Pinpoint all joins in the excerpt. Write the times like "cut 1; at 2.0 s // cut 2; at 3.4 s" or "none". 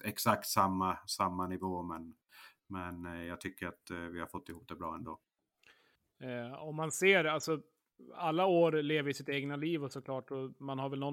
none